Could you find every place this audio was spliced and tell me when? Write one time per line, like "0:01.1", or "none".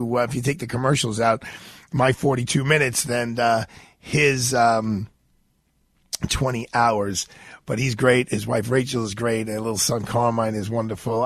none

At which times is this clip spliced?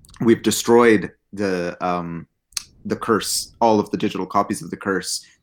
none

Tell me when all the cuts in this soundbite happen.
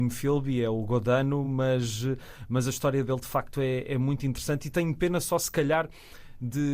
none

